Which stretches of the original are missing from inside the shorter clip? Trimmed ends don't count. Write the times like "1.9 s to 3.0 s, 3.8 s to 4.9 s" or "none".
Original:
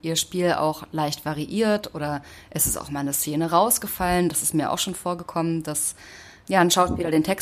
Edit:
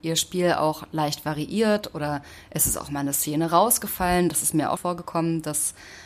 4.8 s to 5.0 s